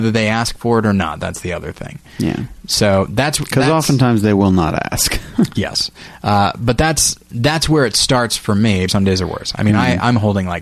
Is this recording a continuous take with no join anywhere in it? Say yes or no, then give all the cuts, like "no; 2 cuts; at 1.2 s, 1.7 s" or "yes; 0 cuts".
no; 2 cuts; at 5.5 s, 8.9 s